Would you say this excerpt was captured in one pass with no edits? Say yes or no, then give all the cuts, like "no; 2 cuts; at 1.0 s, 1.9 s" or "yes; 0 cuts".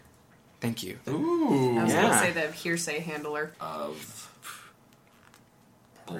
no; 2 cuts; at 1.1 s, 3.5 s